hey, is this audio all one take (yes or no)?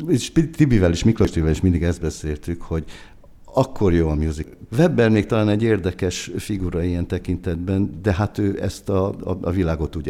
no